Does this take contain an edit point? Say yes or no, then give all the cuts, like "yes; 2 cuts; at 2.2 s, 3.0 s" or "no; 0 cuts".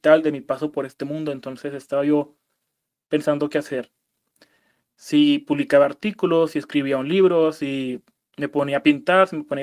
no; 0 cuts